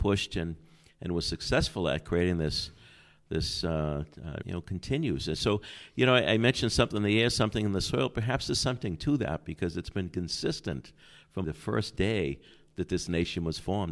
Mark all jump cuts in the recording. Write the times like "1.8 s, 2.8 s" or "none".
4.4 s, 11.4 s